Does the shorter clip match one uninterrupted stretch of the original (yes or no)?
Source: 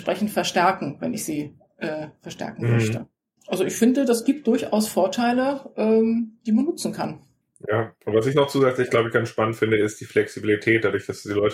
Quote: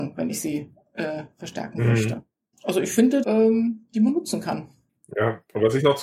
no